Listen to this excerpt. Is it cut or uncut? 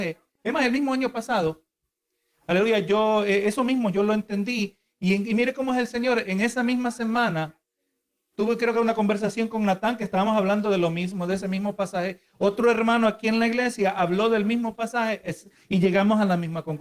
uncut